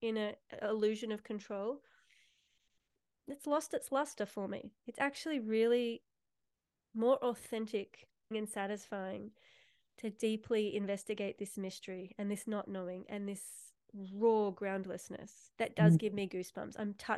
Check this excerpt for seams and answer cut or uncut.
cut